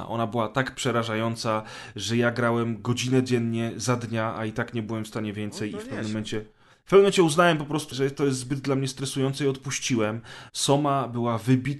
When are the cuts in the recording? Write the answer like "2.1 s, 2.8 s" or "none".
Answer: 7.9 s, 10.5 s

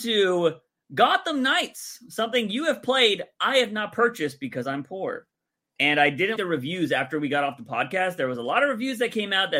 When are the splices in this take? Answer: 6.4 s

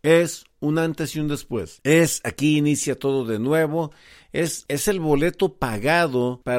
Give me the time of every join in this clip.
none

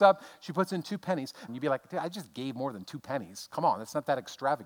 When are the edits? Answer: 1.5 s

